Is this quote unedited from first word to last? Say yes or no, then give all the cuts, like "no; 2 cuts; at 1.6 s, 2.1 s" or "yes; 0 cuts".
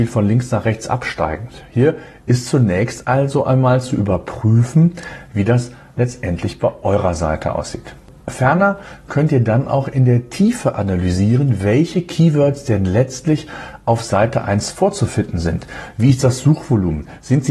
yes; 0 cuts